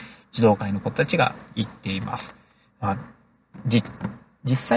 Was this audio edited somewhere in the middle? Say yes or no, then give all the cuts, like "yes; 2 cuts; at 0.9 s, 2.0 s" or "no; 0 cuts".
yes; 1 cut; at 2.7 s